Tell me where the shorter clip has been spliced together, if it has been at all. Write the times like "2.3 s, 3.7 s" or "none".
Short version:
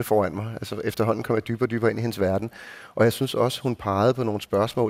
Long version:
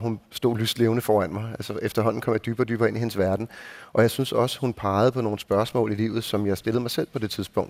none